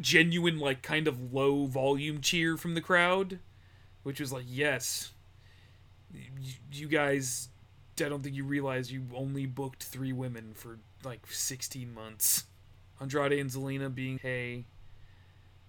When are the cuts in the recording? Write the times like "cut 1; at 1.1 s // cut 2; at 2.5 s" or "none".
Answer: cut 1; at 12.9 s // cut 2; at 14.2 s